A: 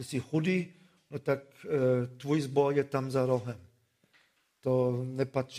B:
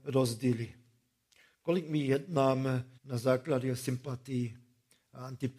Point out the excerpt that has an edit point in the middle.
B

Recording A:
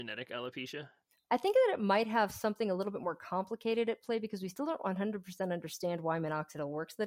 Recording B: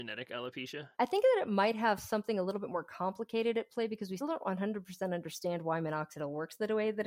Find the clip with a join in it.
B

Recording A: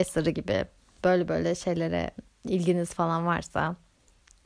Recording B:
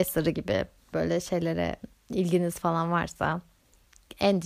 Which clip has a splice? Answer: B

